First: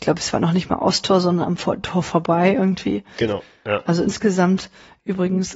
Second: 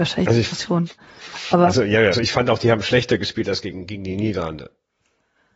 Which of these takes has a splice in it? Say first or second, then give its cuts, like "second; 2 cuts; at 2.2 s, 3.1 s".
second; 1 cut; at 2.1 s